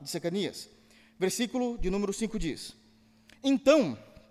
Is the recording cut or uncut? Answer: uncut